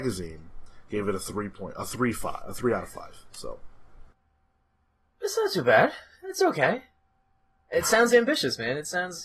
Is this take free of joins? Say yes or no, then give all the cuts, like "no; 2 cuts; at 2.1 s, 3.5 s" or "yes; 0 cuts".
yes; 0 cuts